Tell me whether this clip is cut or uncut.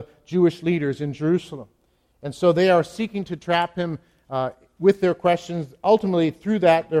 uncut